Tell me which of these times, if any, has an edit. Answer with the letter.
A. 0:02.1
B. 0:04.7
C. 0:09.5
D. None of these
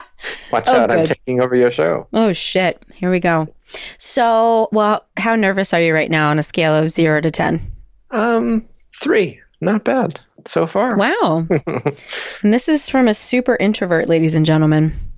D